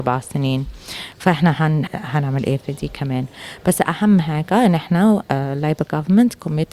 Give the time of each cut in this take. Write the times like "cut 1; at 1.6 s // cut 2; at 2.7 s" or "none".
cut 1; at 1.9 s